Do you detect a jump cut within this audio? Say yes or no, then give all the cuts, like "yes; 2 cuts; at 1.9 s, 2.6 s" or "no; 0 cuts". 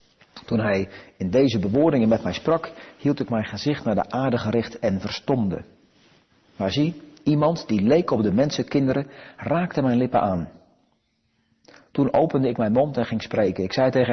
no; 0 cuts